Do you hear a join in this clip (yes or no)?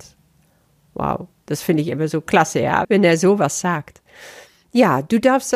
yes